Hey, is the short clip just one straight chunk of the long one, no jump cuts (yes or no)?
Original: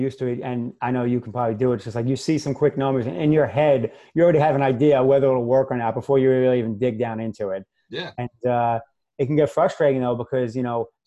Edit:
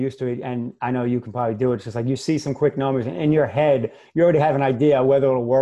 yes